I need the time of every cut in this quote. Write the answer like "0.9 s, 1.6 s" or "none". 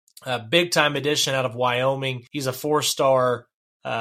2.3 s